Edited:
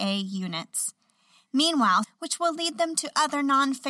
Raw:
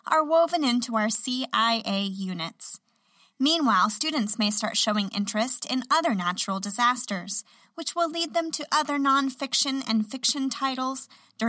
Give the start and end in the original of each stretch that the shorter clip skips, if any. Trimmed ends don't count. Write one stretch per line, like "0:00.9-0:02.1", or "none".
0:03.9-0:07.6